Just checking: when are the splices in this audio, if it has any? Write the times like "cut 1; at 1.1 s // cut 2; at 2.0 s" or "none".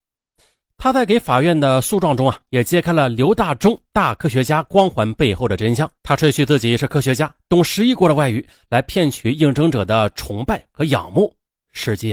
cut 1; at 6.0 s